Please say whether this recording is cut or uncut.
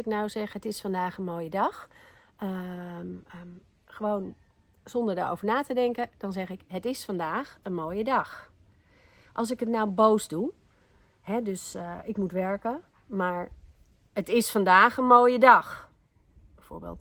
uncut